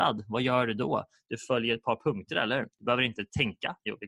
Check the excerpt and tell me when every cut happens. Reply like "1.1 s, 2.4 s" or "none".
none

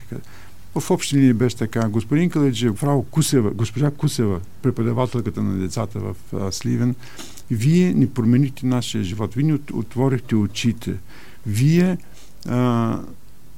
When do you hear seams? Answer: 2.8 s

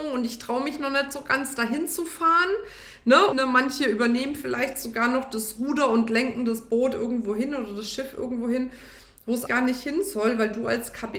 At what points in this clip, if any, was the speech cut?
3.3 s, 9.5 s

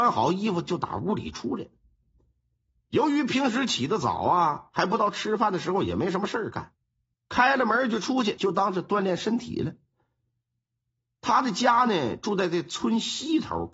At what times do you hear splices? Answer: 7.1 s, 8.4 s

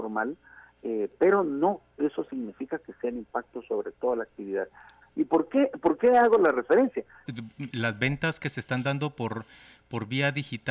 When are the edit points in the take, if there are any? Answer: 5.0 s, 7.3 s

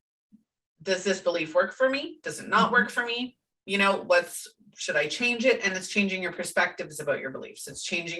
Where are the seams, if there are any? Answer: none

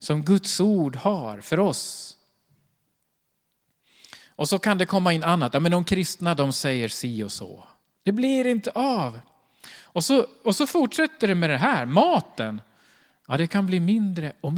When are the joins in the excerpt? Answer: 8.0 s

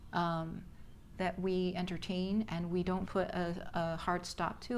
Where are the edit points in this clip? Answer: 1.1 s, 3.1 s

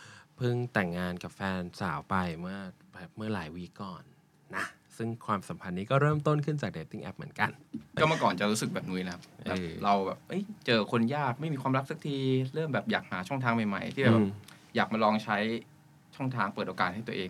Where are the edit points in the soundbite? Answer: none

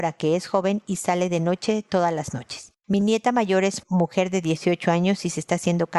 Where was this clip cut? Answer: none

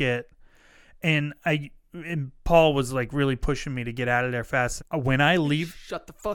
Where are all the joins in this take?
4.8 s

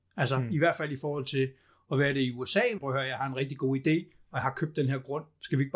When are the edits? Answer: 2.8 s

